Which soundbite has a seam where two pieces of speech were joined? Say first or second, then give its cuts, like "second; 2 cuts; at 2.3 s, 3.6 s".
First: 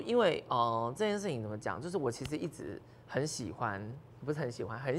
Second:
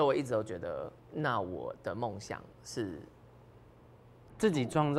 second; 1 cut; at 1.0 s